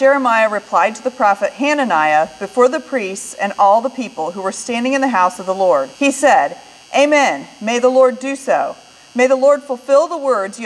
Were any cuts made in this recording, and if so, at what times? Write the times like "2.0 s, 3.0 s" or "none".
5.9 s